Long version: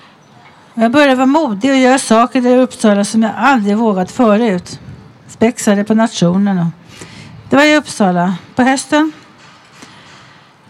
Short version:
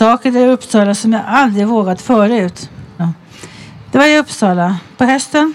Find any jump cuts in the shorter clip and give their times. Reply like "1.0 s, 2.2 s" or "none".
3.0 s